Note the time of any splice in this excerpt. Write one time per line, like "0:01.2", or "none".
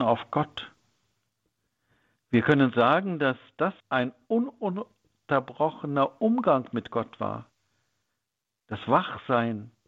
0:03.8